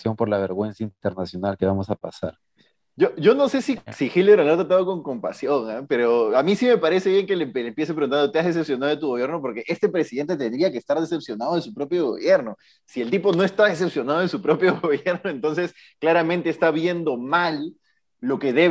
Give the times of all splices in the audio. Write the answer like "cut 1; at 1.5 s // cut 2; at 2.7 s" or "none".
none

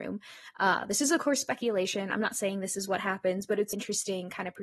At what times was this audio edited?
cut 1; at 3.7 s

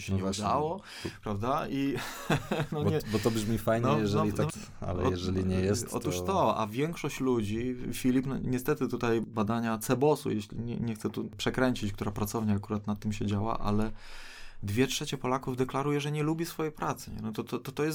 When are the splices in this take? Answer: cut 1; at 4.5 s

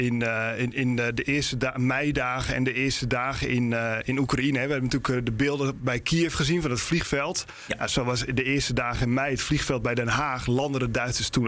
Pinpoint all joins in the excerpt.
none

